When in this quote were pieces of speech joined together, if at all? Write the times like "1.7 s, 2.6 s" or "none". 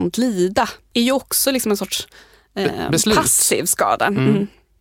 none

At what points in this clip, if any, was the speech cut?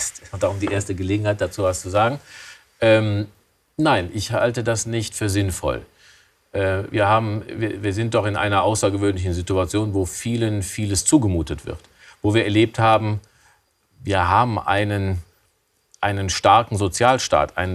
none

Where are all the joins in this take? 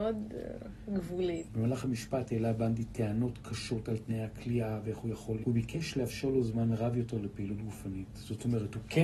1.5 s, 5.4 s

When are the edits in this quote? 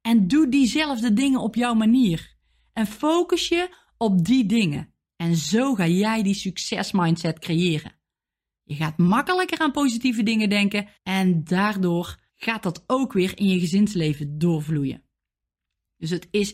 11.0 s, 12.3 s

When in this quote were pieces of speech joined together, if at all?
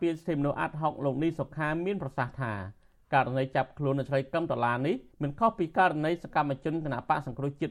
5.1 s

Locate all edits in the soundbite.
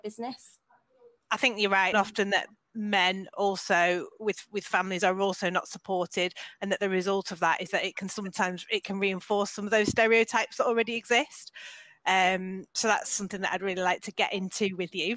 1.9 s

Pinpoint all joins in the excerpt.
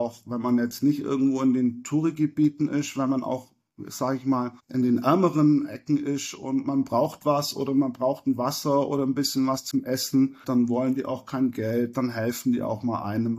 4.6 s, 10.4 s

